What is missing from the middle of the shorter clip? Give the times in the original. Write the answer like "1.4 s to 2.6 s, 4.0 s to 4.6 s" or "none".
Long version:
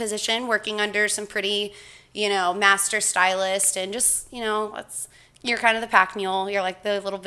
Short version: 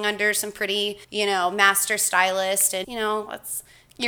1.8 s to 2.1 s, 3.9 s to 4.3 s

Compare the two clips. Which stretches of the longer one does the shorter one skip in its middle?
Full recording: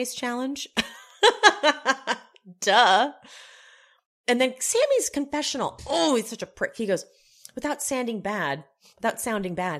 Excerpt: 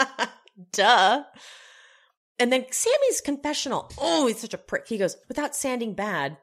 7.1 s to 7.5 s

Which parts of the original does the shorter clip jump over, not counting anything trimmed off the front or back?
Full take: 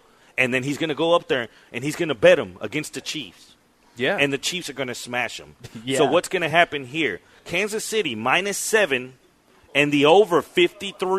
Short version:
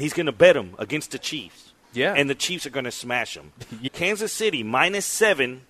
3.7 s to 3.9 s, 5.9 s to 7.4 s

